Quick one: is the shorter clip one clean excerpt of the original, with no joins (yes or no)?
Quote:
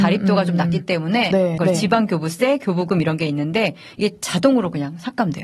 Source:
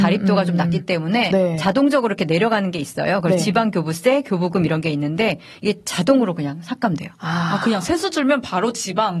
no